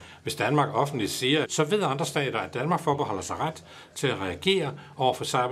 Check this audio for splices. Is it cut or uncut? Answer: cut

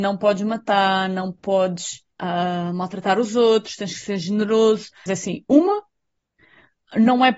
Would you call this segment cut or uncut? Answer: cut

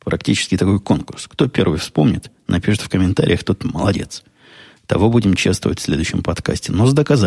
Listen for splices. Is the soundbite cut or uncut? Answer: uncut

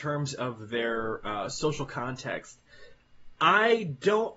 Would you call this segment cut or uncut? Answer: uncut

